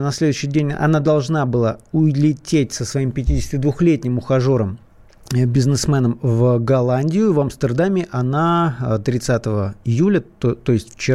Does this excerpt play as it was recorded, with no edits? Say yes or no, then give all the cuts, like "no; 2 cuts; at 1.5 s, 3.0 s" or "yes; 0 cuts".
yes; 0 cuts